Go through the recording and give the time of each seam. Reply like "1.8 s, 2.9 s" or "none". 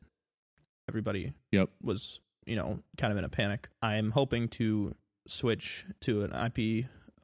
none